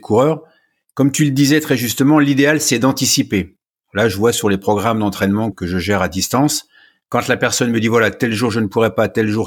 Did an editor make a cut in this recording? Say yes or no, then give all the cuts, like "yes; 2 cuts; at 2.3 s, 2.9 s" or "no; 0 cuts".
yes; 1 cut; at 5.5 s